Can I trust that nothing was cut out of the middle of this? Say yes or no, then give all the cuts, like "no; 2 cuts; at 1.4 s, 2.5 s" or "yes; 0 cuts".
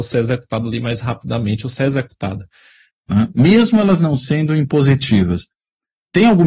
no; 1 cut; at 2.9 s